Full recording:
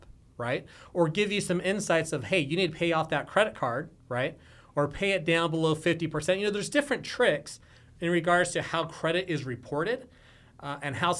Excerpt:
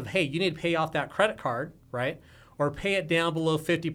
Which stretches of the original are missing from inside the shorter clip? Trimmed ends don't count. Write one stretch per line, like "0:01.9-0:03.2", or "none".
none